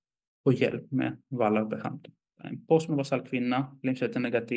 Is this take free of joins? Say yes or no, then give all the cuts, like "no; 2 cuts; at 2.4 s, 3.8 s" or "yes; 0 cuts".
no; 1 cut; at 2.4 s